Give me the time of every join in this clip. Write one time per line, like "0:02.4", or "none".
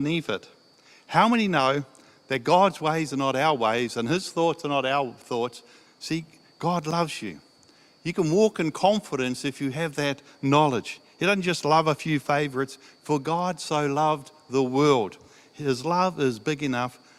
0:05.9